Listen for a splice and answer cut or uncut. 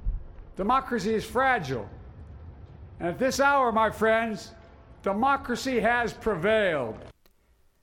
uncut